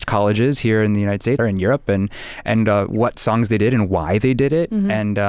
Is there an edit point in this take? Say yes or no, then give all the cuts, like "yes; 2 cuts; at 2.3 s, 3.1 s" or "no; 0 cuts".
yes; 1 cut; at 1.4 s